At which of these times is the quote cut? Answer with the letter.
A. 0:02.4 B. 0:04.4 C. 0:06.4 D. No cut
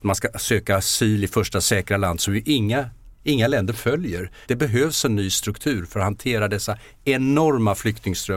B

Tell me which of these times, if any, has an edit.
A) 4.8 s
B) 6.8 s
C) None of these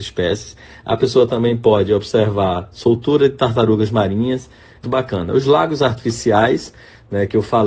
A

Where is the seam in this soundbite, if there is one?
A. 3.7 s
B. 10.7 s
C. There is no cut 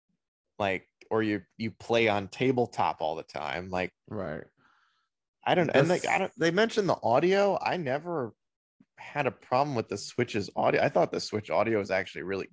C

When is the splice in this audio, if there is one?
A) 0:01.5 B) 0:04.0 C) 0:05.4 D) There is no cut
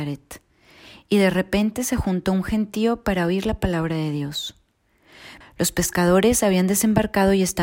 C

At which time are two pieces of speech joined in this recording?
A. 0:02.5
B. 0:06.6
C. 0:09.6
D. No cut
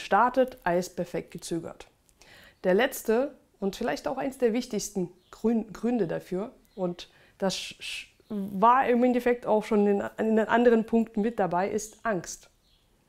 A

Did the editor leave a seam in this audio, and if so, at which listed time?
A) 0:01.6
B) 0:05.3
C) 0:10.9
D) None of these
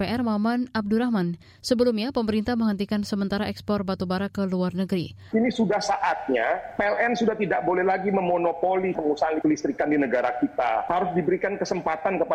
B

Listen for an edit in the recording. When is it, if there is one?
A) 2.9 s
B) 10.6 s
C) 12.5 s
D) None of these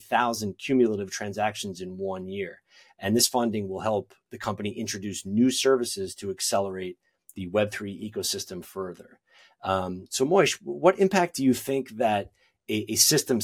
D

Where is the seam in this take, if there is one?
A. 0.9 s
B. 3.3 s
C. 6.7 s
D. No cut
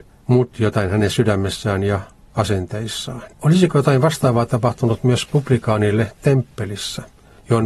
B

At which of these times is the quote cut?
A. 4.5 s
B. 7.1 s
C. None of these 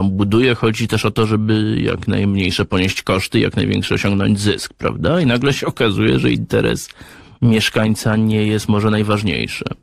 C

